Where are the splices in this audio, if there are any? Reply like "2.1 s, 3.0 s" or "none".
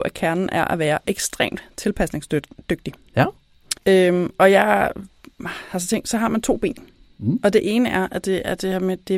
3.8 s